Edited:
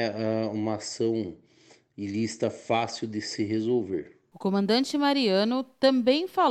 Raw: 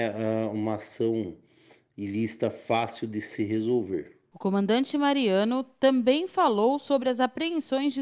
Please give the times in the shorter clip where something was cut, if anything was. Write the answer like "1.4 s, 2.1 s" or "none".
none